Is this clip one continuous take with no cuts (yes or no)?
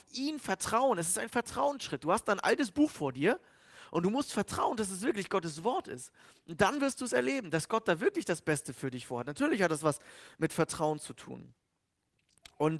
yes